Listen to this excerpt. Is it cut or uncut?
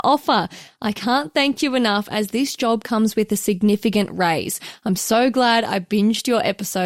uncut